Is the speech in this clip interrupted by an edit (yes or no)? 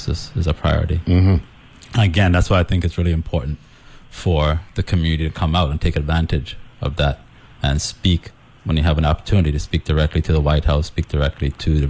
no